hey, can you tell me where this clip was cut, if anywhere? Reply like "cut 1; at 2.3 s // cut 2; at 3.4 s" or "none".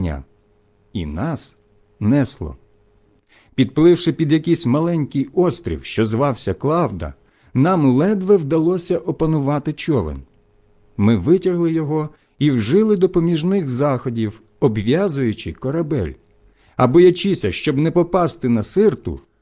none

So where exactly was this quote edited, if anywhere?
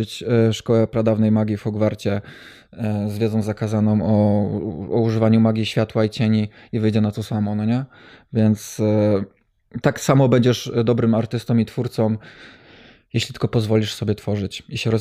cut 1; at 9.8 s

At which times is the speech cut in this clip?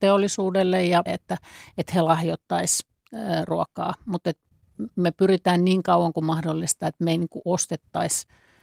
cut 1; at 1.1 s

